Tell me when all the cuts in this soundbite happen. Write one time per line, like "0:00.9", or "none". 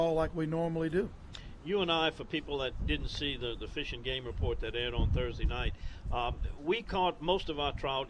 none